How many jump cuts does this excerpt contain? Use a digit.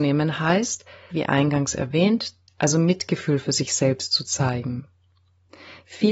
2